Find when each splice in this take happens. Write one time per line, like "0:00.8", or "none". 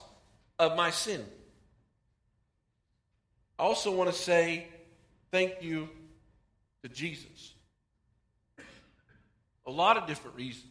0:09.5